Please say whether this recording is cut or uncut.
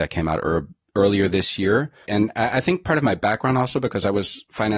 cut